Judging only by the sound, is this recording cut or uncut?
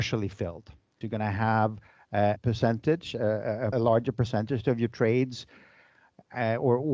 cut